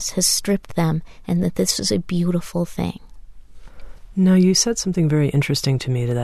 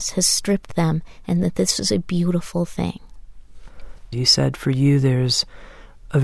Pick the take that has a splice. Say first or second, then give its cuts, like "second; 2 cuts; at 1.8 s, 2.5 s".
second; 1 cut; at 4.1 s